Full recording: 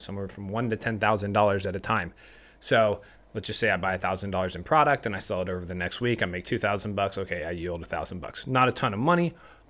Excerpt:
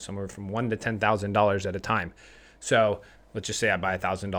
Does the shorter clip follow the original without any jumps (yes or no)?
yes